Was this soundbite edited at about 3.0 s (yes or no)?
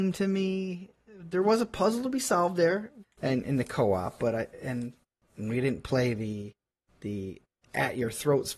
yes